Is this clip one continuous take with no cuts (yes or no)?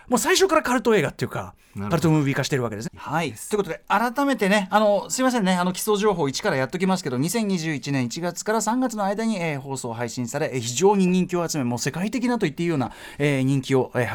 no